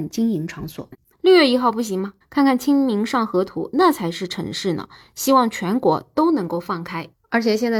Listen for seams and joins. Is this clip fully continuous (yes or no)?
no